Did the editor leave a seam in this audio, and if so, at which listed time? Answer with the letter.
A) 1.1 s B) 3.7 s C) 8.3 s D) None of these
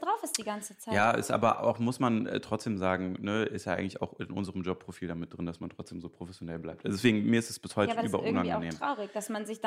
D